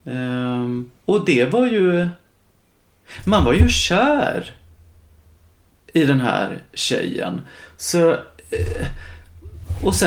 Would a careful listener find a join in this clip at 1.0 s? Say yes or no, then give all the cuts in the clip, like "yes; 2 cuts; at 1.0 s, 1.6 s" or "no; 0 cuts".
yes; 1 cut; at 1.0 s